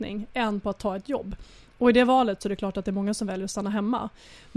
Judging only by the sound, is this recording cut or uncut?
uncut